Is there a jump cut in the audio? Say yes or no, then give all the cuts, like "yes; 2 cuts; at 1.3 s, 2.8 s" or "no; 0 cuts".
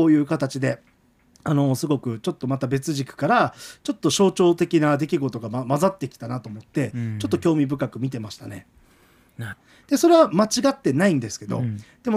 yes; 1 cut; at 9.5 s